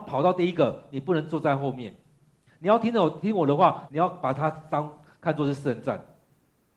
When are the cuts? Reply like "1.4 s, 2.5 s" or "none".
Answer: 3.9 s